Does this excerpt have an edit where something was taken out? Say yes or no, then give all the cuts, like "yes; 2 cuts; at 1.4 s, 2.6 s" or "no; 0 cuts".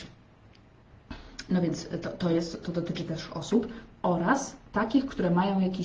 no; 0 cuts